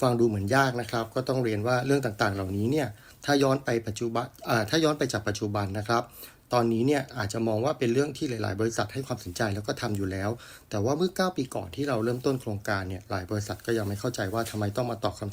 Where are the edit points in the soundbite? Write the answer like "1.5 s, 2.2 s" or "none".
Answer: none